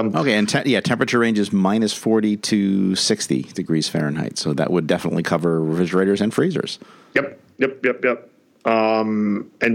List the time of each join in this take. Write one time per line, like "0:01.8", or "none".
none